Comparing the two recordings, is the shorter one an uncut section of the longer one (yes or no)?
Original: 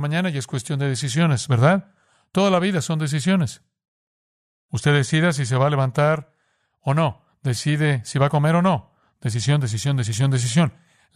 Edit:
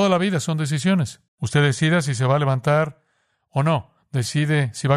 no